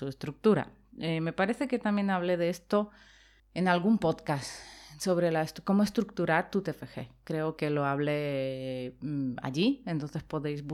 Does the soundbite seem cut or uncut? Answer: cut